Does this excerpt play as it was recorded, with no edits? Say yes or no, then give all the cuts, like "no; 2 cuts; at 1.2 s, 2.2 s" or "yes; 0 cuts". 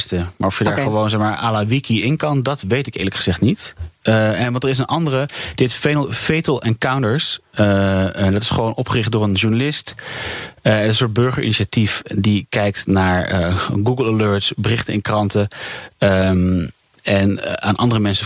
yes; 0 cuts